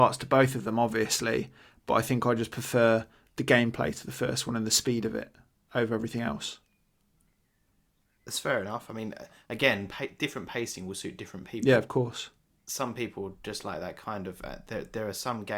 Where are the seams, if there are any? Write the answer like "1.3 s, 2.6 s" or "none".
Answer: none